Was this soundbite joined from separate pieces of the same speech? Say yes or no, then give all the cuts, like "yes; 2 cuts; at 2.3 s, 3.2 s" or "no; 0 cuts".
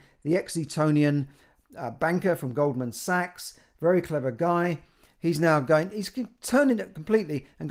no; 0 cuts